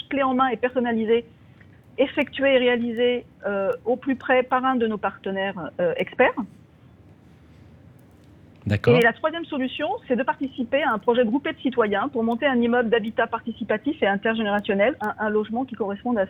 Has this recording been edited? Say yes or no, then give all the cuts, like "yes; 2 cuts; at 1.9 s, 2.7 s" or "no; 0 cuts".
yes; 2 cuts; at 10.0 s, 15.0 s